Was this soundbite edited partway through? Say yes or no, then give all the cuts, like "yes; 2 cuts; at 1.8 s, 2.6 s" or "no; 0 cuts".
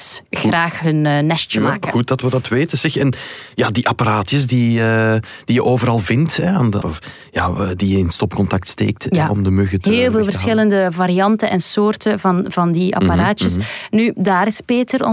yes; 1 cut; at 6.8 s